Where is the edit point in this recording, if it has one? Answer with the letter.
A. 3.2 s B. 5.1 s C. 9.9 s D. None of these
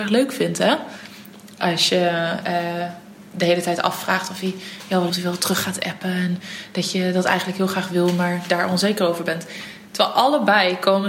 B